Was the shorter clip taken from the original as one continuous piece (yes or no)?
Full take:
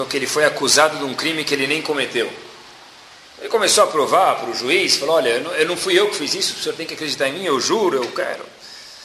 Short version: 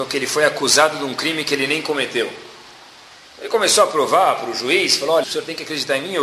no